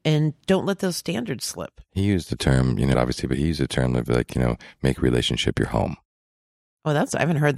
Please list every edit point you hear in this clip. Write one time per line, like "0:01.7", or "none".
0:02.9